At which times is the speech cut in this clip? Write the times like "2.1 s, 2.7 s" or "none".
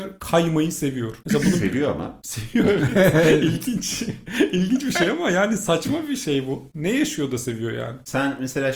none